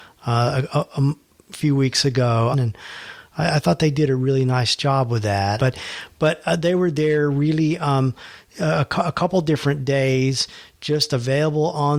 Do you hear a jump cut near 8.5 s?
no; 2 cuts; at 2.5 s, 5.6 s

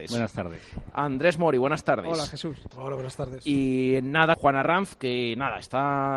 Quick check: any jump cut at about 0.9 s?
no; 2 cuts; at 2.7 s, 4.3 s

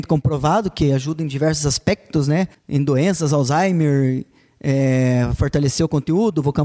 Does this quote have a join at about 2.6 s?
no; 0 cuts

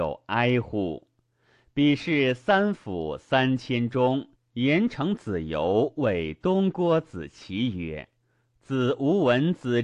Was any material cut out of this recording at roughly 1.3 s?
no; 2 cuts; at 4.4 s, 8.2 s

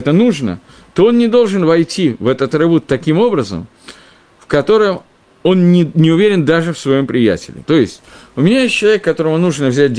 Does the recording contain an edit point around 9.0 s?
no; 1 cut; at 7.6 s

